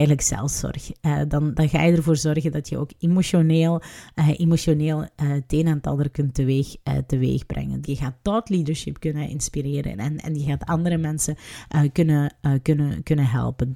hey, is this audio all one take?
no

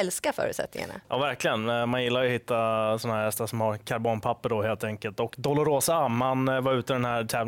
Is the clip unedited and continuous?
yes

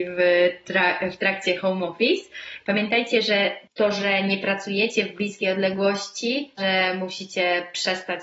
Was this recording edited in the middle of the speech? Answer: yes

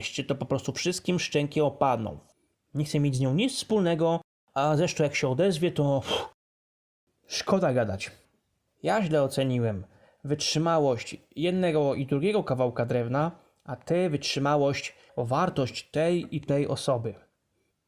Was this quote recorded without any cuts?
no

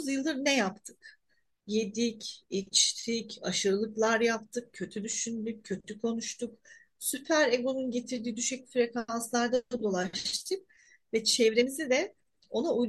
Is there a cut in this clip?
no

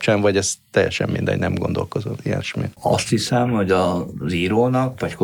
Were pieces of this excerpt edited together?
no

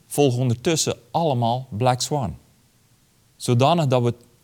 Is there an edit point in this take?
yes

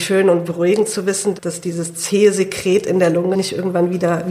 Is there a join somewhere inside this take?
yes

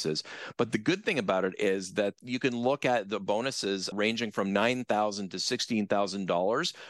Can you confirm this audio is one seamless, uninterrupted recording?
no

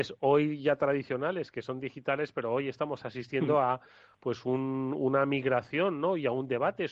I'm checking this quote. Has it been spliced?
no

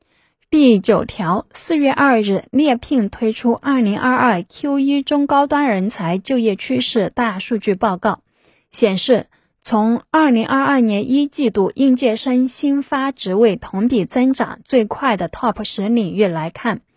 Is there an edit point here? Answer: no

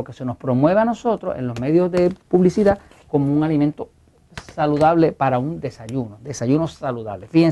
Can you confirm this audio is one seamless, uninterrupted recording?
yes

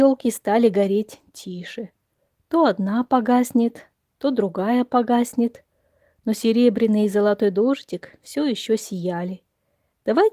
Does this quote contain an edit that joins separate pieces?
no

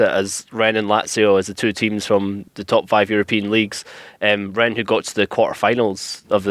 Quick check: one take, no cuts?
yes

